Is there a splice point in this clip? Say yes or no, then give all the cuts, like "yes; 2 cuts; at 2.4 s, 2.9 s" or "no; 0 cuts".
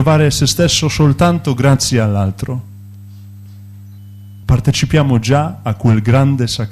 yes; 1 cut; at 4.4 s